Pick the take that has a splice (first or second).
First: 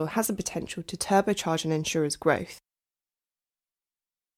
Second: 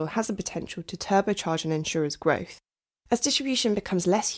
second